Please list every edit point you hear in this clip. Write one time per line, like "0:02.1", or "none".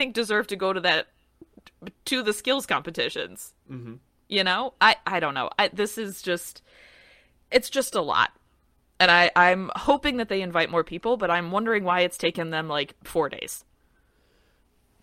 none